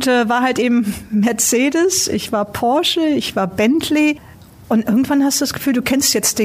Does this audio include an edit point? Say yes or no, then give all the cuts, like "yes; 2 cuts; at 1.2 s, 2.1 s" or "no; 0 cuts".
no; 0 cuts